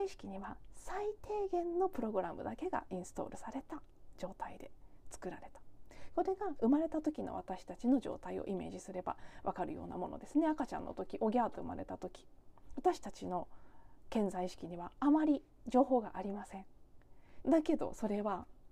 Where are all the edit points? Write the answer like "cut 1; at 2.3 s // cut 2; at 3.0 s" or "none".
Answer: cut 1; at 17.4 s